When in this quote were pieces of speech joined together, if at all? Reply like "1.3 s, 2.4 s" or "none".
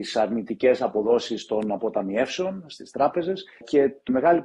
none